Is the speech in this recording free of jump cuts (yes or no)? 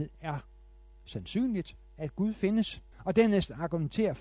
no